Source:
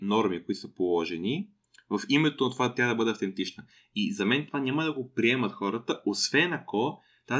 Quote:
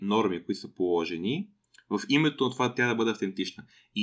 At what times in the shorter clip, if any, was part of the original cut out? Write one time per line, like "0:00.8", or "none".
none